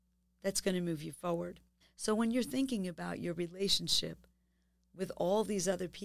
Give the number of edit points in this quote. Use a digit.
1